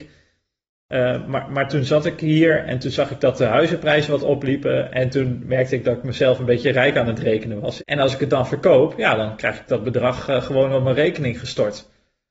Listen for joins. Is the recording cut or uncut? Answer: cut